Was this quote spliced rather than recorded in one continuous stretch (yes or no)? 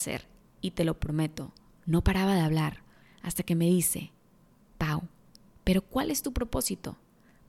yes